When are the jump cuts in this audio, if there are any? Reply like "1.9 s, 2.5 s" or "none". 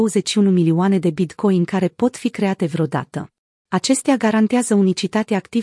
3.7 s